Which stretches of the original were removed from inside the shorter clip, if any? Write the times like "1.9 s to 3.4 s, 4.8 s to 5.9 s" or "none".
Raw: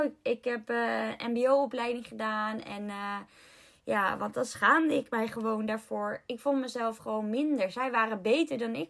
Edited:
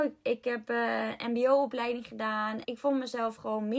2.6 s to 6.2 s

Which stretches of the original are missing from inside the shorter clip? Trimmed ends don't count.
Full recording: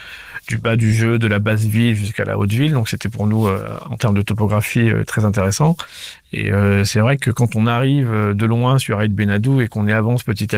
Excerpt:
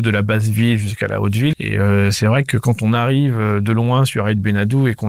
2.7 s to 6.3 s

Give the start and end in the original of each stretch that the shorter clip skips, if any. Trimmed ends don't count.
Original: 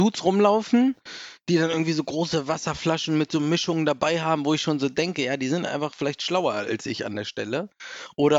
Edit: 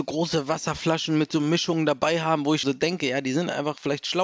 4.6 s to 4.8 s

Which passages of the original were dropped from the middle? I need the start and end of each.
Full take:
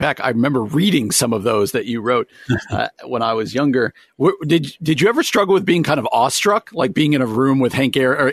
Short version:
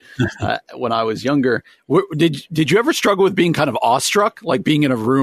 none

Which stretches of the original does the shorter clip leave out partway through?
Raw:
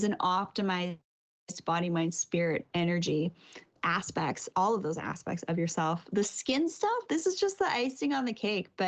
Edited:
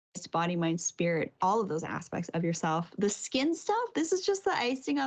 2.7 s to 4.5 s

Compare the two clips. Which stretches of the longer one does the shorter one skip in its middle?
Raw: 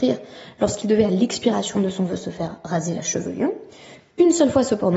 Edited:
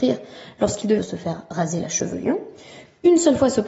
1.0 s to 2.1 s

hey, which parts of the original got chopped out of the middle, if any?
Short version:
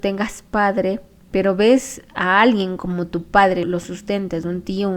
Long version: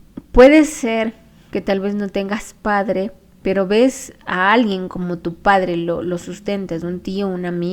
5.7 s to 6.0 s

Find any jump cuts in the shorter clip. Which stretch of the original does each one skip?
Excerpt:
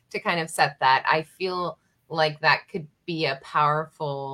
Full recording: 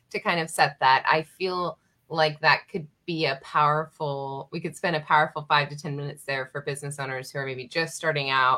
none

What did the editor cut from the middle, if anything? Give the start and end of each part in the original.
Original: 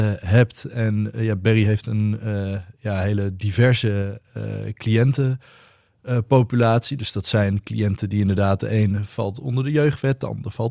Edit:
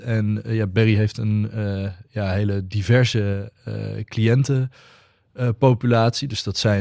none

